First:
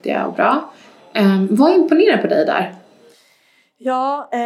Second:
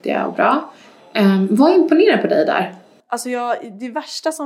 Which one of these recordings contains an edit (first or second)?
second